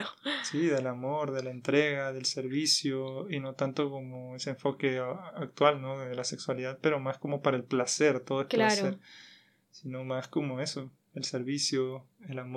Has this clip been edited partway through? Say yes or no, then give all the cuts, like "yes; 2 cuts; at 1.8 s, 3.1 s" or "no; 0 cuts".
no; 0 cuts